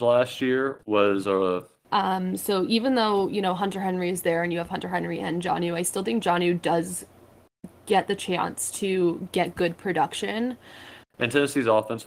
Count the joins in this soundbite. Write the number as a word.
two